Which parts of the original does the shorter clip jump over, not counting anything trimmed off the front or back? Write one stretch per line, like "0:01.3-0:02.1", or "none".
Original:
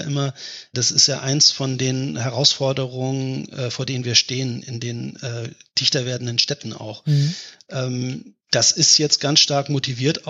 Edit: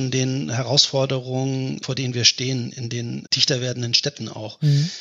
0:03.5-0:03.7
0:05.2-0:05.7

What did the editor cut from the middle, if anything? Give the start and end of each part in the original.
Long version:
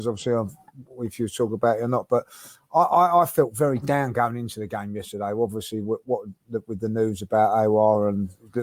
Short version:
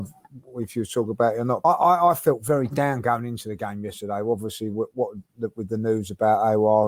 0:02.1-0:02.8

